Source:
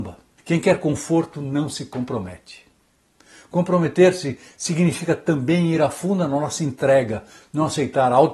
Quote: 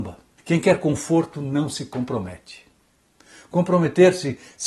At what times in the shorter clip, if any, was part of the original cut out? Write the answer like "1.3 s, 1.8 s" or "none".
none